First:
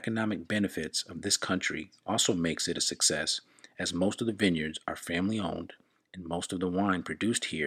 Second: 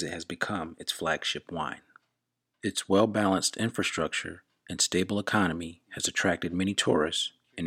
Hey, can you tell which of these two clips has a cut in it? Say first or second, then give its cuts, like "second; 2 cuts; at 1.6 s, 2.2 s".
second; 1 cut; at 2.5 s